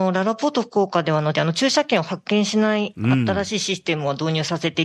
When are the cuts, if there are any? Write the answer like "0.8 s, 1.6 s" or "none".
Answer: 1.3 s